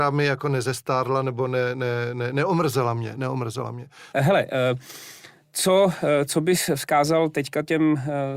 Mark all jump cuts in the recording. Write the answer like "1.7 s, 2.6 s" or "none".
4.1 s